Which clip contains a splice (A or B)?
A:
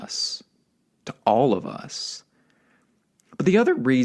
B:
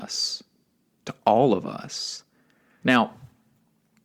B